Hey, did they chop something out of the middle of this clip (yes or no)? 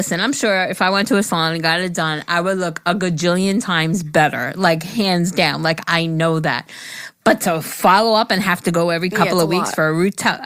no